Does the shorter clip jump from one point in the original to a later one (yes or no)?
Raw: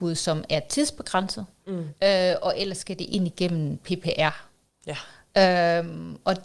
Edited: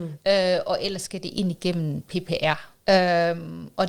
yes